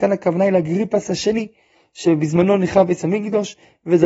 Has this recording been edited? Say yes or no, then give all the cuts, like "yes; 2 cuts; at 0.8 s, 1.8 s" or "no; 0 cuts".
no; 0 cuts